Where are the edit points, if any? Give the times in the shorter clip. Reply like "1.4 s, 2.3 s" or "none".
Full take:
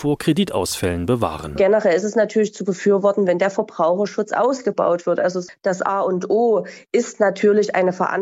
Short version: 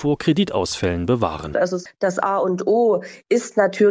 1.5 s